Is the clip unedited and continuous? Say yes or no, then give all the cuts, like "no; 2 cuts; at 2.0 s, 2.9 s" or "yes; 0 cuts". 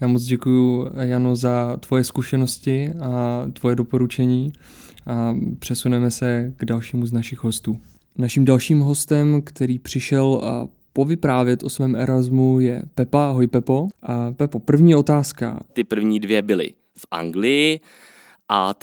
no; 2 cuts; at 13.9 s, 15.7 s